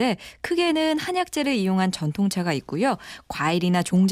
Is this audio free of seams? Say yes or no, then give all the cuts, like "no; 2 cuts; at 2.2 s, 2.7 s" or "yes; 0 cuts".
yes; 0 cuts